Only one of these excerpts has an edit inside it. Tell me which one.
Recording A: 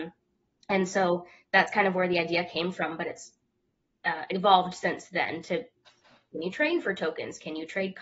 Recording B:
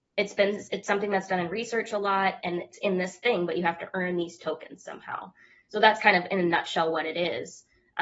B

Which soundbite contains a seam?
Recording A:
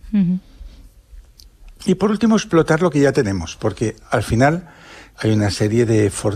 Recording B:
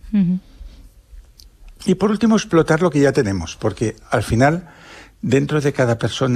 A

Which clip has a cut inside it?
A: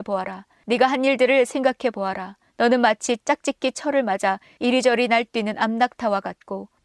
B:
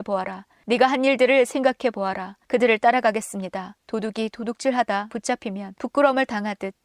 B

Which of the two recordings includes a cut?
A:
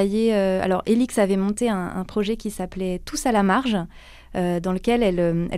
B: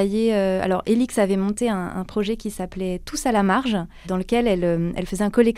B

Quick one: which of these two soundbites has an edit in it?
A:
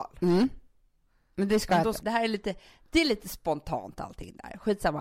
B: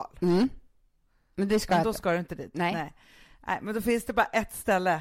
A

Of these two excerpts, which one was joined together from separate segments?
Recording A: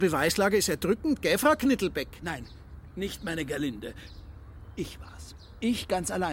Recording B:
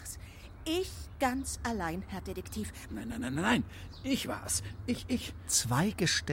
B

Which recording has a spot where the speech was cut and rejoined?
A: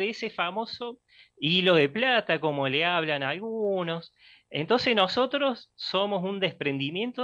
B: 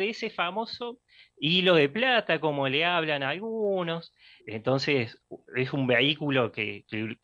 B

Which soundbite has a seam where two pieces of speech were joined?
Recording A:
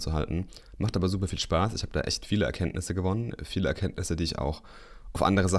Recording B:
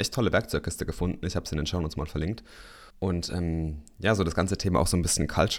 B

